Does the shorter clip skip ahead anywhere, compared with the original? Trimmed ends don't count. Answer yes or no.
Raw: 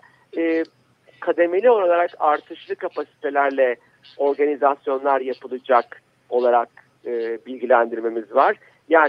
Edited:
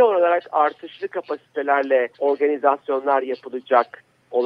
yes